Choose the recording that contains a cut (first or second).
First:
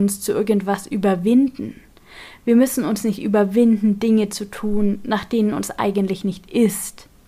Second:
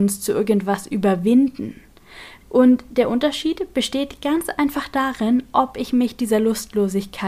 second